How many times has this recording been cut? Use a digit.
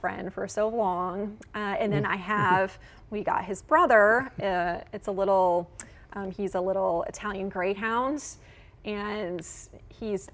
0